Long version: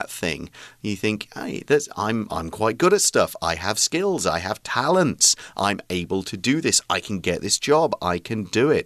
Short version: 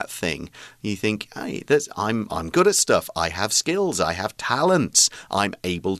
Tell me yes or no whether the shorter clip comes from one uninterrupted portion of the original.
no